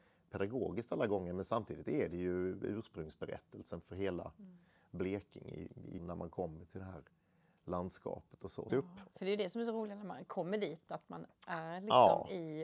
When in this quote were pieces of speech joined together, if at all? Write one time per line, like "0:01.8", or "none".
0:06.0
0:08.7